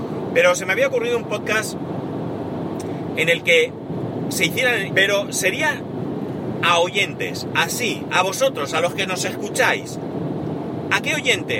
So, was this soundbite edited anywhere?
yes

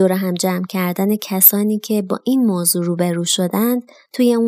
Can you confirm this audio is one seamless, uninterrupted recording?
yes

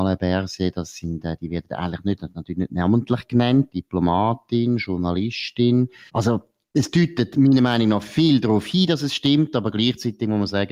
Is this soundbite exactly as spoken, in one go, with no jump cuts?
no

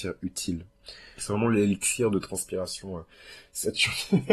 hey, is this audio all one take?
no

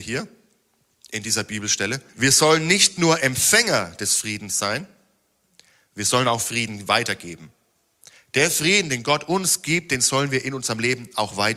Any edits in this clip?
yes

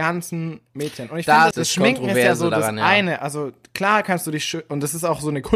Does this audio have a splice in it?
yes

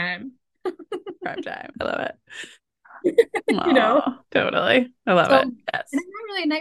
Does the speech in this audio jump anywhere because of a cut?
yes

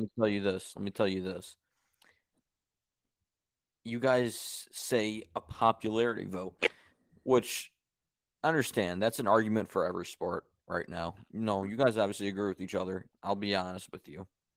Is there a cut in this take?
yes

